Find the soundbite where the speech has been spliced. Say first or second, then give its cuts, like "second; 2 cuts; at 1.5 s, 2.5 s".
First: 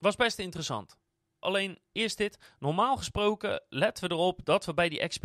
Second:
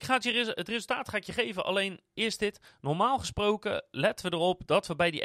first; 1 cut; at 1.4 s